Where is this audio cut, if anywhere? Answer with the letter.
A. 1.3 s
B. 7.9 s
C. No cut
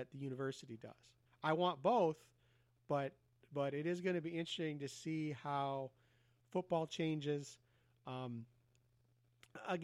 A